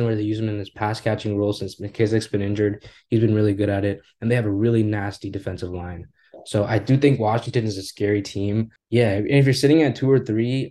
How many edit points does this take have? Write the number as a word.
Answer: one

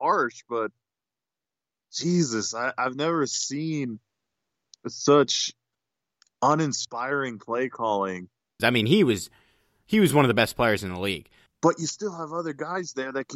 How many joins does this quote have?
two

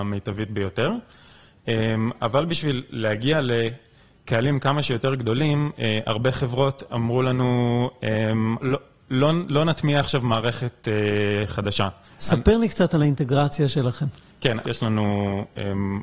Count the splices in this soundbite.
three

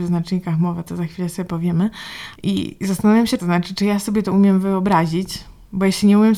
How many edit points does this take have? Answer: two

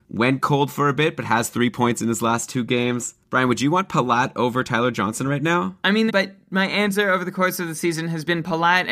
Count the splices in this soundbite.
one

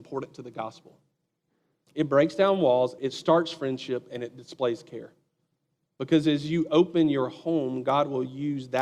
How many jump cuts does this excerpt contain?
two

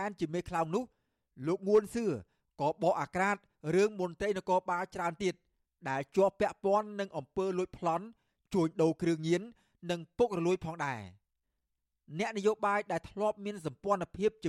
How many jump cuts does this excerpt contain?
zero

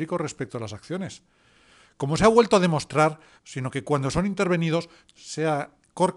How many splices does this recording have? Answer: two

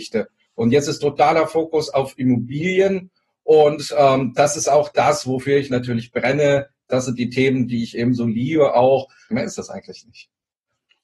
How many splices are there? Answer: one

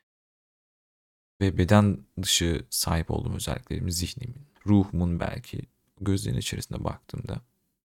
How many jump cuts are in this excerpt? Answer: one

